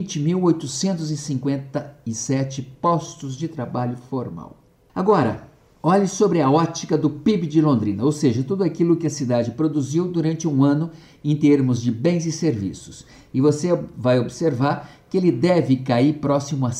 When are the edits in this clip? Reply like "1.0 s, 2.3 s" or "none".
none